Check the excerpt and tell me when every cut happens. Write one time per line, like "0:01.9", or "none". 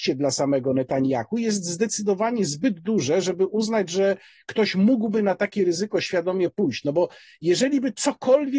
none